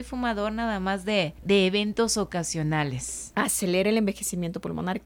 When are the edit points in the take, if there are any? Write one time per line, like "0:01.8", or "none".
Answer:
0:01.4
0:03.3